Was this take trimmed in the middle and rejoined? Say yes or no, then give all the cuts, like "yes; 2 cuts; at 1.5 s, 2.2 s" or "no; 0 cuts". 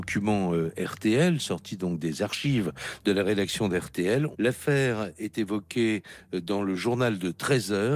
yes; 1 cut; at 4.3 s